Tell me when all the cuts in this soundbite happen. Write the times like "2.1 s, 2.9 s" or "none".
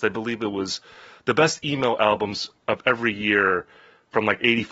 none